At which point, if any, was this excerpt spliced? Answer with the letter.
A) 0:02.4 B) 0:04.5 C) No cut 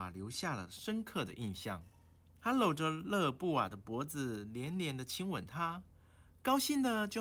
A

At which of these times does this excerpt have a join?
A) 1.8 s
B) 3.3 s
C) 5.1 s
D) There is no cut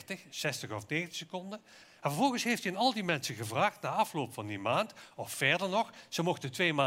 A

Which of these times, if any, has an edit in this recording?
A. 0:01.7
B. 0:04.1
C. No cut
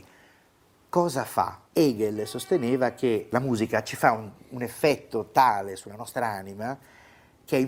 A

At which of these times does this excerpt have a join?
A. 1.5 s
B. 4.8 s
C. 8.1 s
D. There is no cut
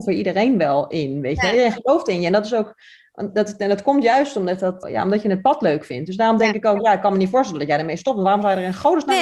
B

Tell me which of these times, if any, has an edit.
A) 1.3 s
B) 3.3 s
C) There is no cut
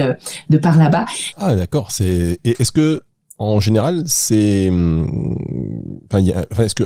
A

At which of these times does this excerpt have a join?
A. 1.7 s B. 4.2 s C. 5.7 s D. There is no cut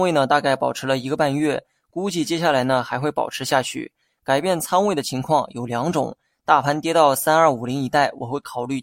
D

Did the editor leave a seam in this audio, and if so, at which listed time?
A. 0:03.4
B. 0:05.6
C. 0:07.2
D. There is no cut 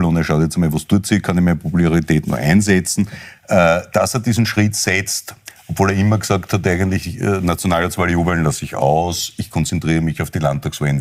D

